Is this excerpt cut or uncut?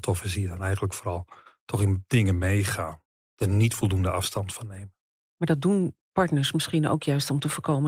uncut